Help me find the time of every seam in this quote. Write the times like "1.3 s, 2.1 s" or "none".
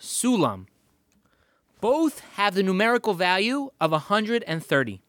none